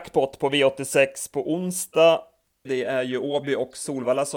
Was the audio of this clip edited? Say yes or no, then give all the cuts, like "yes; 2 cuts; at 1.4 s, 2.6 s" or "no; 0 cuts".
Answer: yes; 1 cut; at 2.7 s